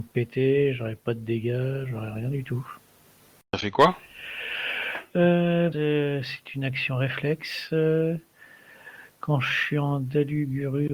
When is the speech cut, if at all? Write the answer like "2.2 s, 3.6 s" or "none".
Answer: 5.7 s